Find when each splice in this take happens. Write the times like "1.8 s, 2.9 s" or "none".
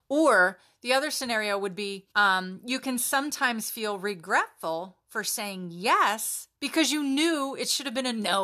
2.1 s, 6.6 s